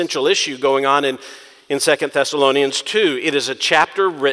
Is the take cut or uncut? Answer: uncut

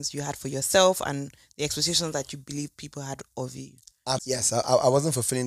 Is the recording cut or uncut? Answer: cut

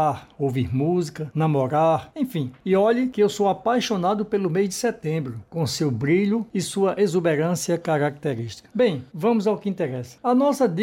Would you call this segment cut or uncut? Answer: uncut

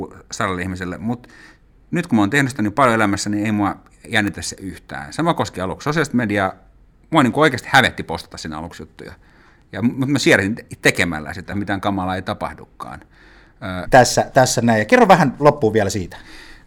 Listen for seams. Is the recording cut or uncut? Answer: cut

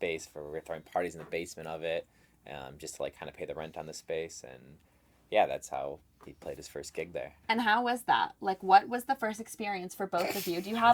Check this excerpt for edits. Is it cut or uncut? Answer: uncut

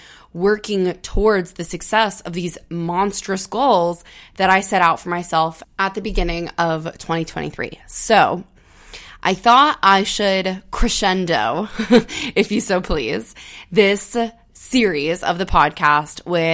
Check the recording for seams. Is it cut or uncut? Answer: uncut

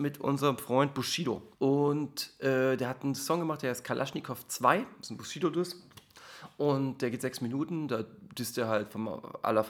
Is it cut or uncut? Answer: cut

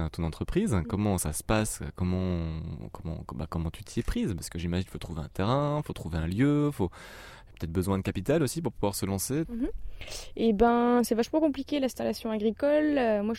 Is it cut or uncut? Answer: cut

